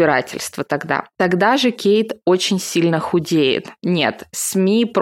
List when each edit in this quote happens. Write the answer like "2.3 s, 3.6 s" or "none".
3.8 s